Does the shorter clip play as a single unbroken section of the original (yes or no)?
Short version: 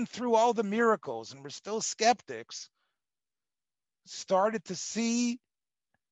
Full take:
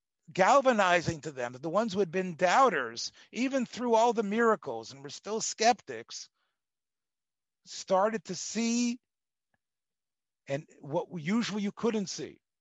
yes